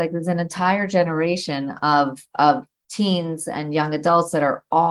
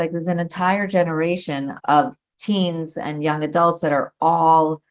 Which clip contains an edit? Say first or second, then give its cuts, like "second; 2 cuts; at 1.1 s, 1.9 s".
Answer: second; 1 cut; at 1.8 s